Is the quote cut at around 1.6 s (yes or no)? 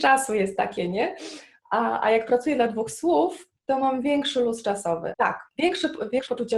no